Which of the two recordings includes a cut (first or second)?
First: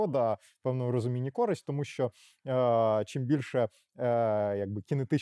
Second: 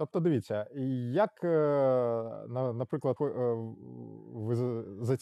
second